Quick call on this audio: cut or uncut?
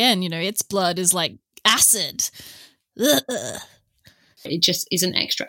cut